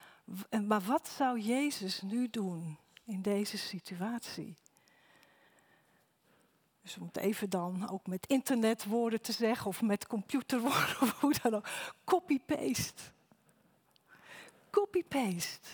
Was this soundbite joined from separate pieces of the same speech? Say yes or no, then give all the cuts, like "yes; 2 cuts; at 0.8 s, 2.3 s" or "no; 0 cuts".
no; 0 cuts